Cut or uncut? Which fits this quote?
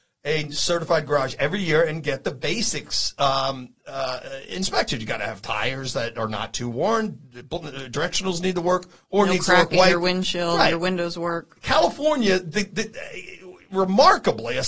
uncut